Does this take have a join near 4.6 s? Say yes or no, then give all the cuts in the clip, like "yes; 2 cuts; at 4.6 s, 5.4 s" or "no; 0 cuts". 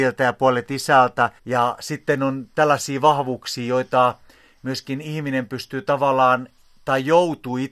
no; 1 cut; at 1.4 s